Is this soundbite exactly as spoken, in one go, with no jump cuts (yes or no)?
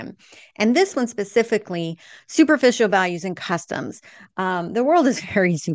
yes